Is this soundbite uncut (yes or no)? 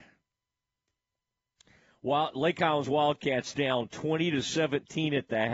yes